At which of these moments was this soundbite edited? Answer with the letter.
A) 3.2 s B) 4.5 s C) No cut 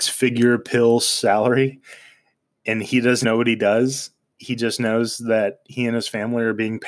A